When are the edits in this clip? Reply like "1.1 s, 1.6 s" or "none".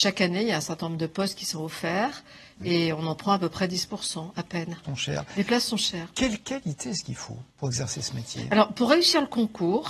4.8 s, 7.5 s